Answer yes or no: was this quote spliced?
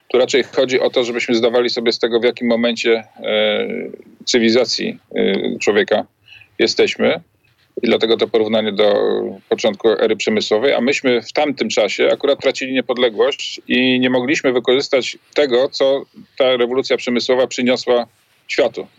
no